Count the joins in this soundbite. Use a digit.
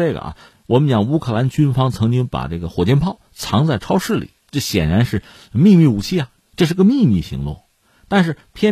2